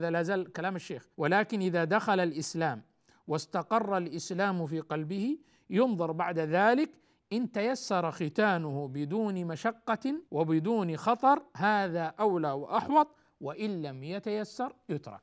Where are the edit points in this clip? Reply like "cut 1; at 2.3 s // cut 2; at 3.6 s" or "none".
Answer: cut 1; at 1.1 s // cut 2; at 10.3 s